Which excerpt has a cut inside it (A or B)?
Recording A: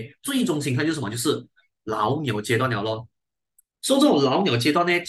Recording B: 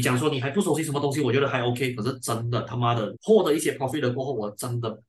B